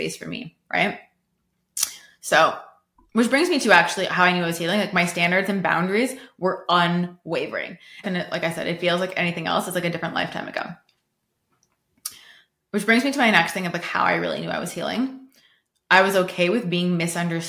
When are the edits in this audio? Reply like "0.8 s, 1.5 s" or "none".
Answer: 8.0 s